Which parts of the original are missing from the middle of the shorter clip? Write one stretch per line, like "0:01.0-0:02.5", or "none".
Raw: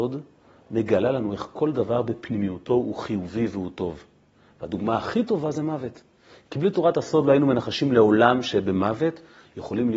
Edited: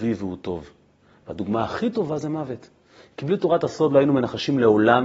none